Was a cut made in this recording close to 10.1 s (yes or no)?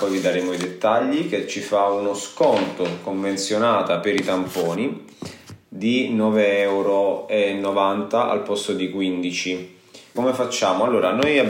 yes